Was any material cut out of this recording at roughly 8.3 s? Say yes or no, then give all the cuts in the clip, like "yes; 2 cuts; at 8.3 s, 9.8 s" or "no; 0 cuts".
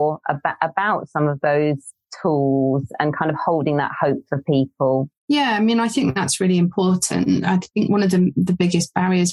no; 0 cuts